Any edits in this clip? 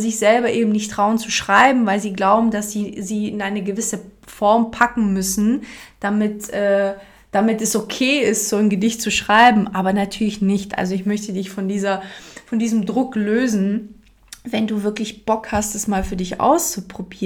no; 0 cuts

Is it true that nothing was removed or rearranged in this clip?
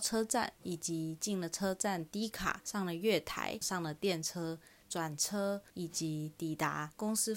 yes; 0 cuts

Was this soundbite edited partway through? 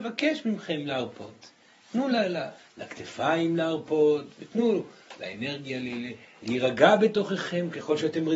no; 0 cuts

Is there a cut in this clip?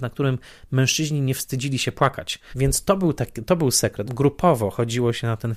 yes; 2 cuts; at 2.5 s, 4.1 s

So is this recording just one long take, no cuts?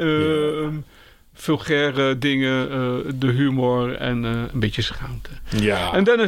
yes; 0 cuts

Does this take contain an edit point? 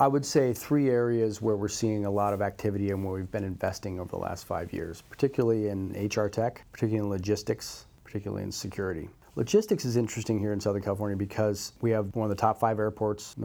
no; 0 cuts

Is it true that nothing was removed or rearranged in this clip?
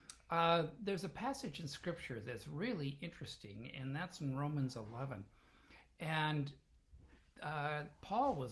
yes; 0 cuts

